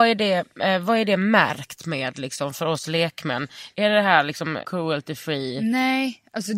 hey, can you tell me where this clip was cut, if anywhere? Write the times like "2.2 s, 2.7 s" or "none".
none